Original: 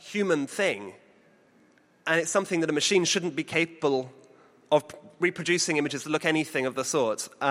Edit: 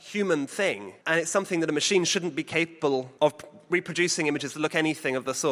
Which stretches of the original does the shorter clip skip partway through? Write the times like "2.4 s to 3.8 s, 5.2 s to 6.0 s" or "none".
1.0 s to 2.0 s, 4.2 s to 4.7 s